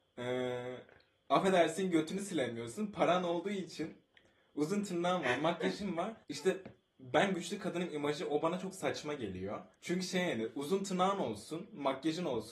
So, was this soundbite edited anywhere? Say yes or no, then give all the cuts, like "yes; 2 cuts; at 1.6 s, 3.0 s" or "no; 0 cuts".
yes; 2 cuts; at 6.2 s, 9.7 s